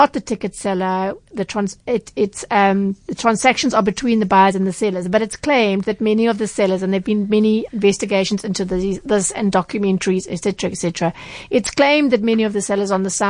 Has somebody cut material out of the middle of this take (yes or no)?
yes